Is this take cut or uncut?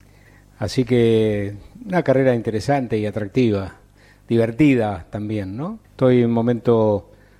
cut